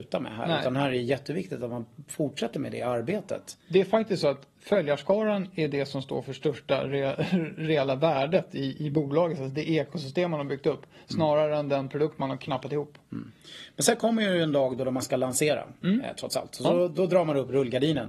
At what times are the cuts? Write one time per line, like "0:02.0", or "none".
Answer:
none